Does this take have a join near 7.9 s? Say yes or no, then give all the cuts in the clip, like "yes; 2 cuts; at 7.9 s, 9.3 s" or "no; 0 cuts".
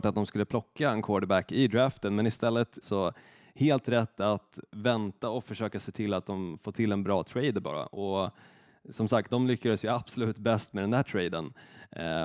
no; 2 cuts; at 2.8 s, 9.3 s